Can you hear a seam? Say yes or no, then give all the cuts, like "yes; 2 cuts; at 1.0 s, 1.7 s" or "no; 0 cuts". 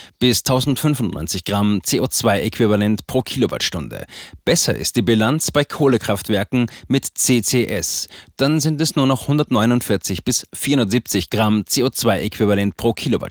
no; 0 cuts